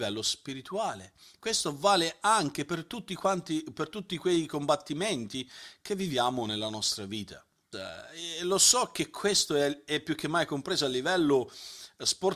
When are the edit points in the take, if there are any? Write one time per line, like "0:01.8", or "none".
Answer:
0:07.7